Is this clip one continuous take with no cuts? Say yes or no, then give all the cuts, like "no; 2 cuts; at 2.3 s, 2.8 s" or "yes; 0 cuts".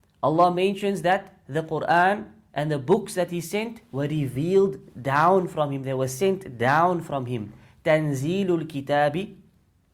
yes; 0 cuts